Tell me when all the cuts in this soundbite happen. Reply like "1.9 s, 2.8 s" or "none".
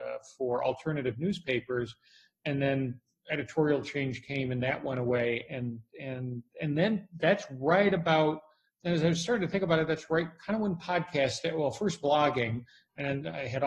none